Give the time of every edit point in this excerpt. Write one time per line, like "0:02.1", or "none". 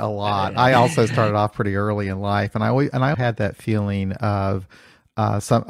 0:03.1